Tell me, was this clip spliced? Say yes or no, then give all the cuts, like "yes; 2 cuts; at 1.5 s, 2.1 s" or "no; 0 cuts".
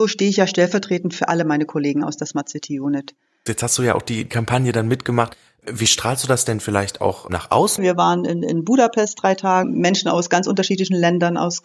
yes; 3 cuts; at 3.5 s, 7.8 s, 9.6 s